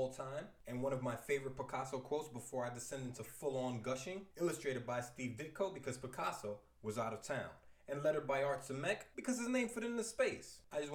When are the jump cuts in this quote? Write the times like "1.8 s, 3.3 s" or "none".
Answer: 4.3 s